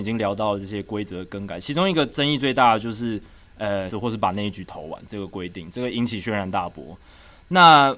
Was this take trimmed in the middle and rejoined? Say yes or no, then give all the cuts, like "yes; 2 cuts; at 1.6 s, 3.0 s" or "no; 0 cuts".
yes; 1 cut; at 3.9 s